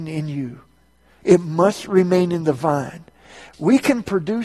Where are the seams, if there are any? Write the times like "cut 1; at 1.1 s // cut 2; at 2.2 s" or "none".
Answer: cut 1; at 1.2 s // cut 2; at 3.5 s